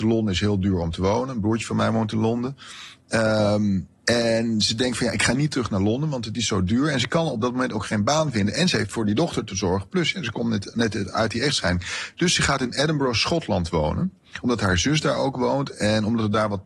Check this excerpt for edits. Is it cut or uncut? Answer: uncut